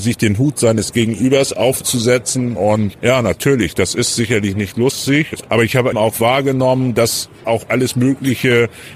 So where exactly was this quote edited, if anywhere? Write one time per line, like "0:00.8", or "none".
0:05.9
0:07.4